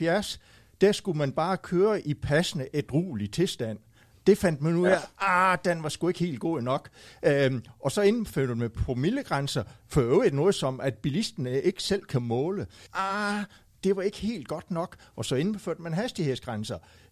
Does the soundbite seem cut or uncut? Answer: cut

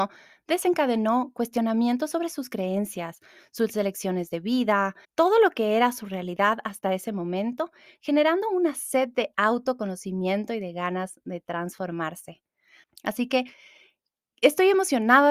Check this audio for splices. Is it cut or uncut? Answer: cut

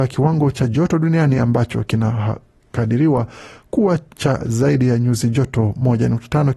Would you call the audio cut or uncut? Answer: uncut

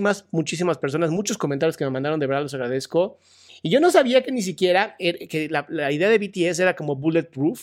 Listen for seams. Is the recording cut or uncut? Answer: cut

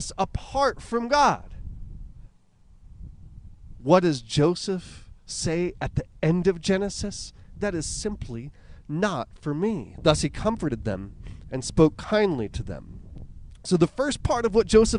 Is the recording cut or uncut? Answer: cut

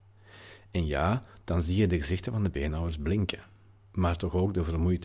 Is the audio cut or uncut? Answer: uncut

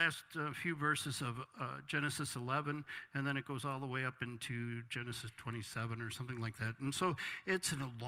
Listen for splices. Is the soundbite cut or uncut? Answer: uncut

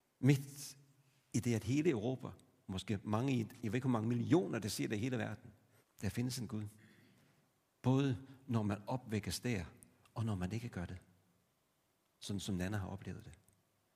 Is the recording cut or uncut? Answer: cut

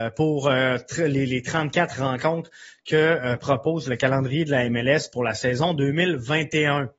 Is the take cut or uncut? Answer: cut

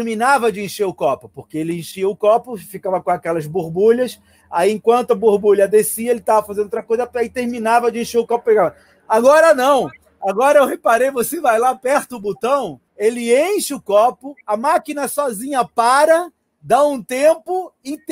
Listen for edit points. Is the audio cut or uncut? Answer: cut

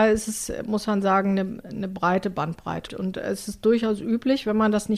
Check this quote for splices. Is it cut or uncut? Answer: cut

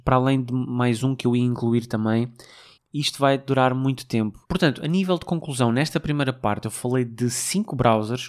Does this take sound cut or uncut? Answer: cut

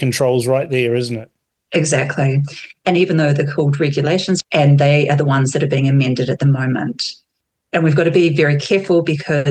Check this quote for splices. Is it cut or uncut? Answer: cut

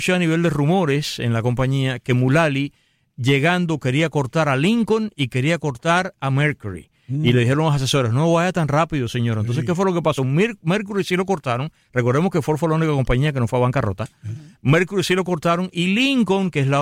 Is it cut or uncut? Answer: uncut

